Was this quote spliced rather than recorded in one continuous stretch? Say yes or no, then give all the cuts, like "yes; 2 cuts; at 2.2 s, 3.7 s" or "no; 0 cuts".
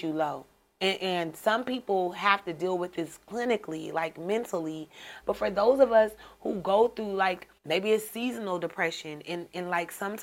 yes; 2 cuts; at 5.2 s, 7.6 s